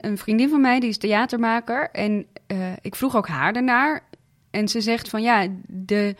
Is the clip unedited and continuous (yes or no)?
yes